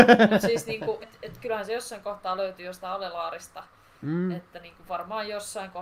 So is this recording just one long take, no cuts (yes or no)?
no